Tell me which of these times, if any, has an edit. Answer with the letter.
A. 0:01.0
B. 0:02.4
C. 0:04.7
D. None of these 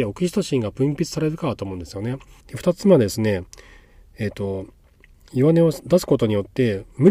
B